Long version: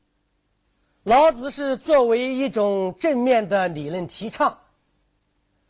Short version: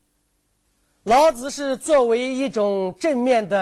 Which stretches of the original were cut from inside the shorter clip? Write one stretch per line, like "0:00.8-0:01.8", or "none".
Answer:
none